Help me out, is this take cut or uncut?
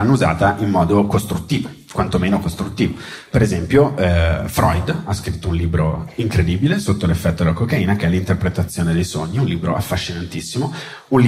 uncut